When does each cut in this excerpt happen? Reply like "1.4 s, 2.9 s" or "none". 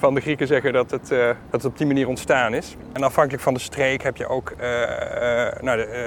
1.5 s